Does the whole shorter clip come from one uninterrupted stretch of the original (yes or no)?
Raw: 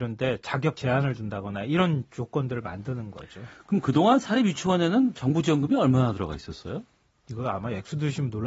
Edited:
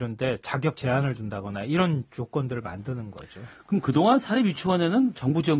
yes